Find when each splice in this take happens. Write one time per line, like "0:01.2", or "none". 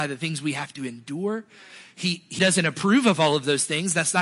0:02.4